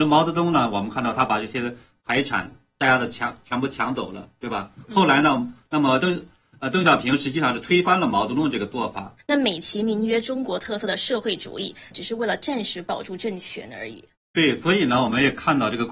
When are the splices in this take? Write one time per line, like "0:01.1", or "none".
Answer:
0:09.2
0:11.9

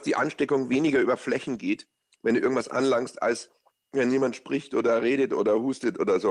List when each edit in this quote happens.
none

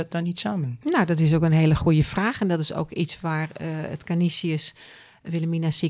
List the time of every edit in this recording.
none

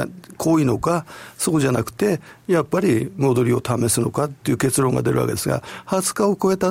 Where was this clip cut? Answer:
none

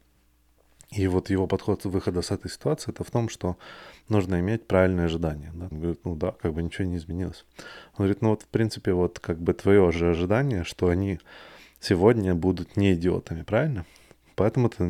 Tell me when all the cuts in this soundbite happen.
0:05.7

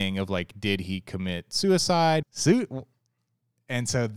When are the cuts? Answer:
0:02.2

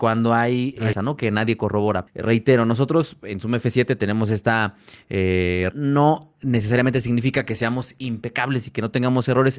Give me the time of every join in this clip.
0:00.9
0:02.1
0:05.7

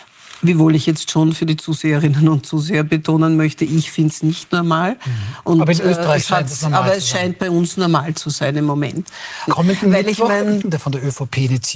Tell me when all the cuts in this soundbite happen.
0:09.5
0:10.6

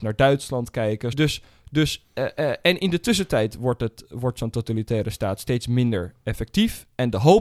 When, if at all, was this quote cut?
0:01.1

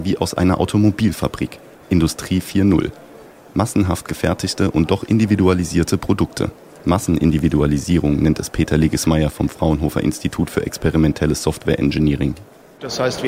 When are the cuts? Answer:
0:01.7

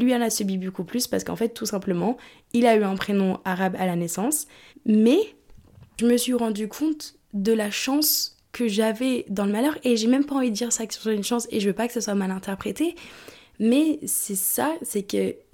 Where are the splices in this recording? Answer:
0:04.7

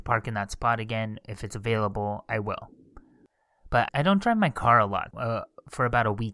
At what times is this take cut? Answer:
0:03.9
0:05.1

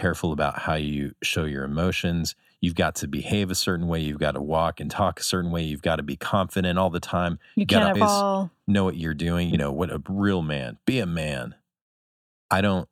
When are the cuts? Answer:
0:08.0
0:09.5

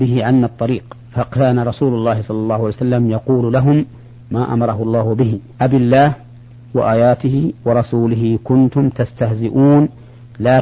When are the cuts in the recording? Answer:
0:01.0
0:05.5

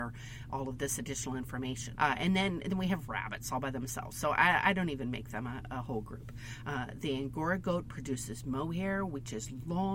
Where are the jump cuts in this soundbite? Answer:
0:02.0
0:06.6

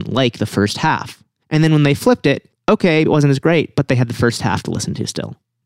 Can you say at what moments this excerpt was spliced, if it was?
0:01.4
0:03.1

